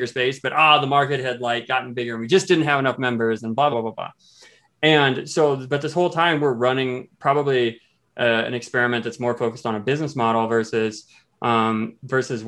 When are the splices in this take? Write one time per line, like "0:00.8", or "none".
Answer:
0:03.7